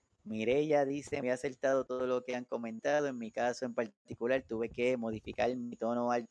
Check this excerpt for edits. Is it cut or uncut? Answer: cut